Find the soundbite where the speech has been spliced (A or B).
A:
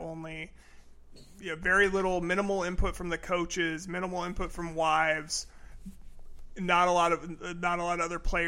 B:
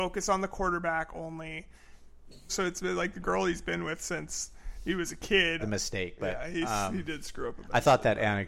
B